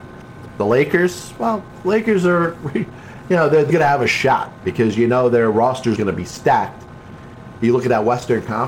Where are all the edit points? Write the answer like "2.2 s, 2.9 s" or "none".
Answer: 3.7 s, 6.0 s, 7.5 s